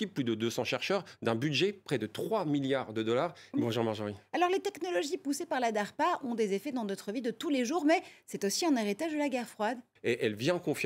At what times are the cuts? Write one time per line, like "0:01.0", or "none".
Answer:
0:03.5
0:10.0